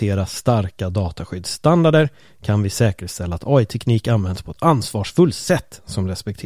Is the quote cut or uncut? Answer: uncut